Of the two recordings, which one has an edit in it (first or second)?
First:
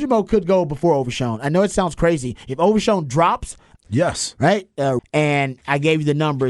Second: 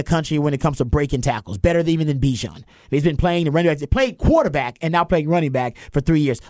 first